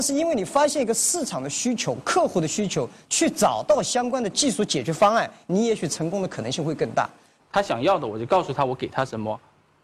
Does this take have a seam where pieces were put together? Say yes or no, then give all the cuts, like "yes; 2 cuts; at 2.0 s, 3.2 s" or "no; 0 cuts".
yes; 1 cut; at 7.4 s